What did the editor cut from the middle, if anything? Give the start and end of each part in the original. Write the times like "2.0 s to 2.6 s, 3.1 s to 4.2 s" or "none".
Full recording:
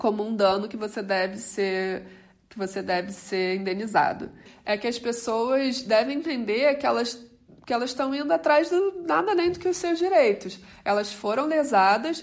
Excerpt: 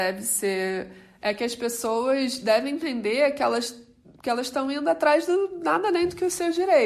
2.3 s to 4.6 s